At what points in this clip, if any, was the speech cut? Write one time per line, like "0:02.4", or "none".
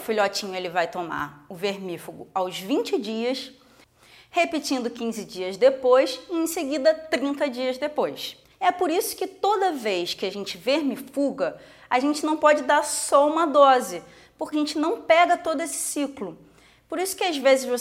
0:08.5
0:14.5